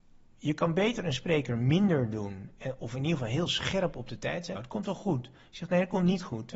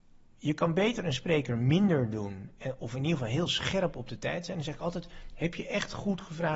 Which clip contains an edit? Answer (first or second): first